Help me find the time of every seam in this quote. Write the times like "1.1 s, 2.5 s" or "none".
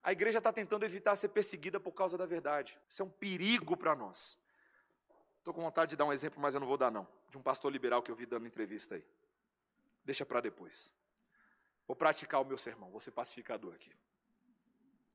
2.8 s